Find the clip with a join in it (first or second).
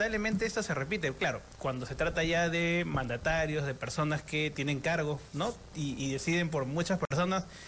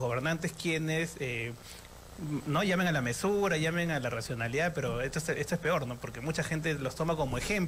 first